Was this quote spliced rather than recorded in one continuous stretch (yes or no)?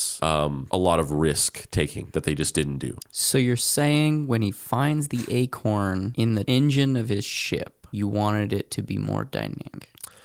yes